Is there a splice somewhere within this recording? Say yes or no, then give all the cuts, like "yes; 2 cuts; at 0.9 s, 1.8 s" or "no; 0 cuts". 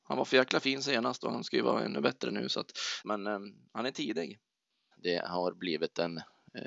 yes; 2 cuts; at 3.0 s, 4.9 s